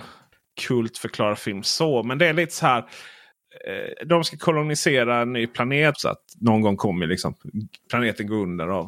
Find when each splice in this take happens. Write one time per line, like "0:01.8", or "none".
0:04.0
0:05.9